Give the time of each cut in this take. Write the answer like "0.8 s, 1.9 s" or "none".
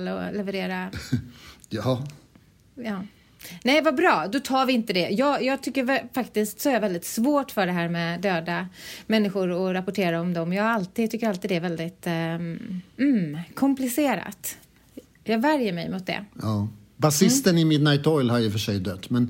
none